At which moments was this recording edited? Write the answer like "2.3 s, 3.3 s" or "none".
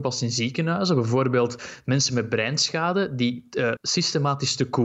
3.8 s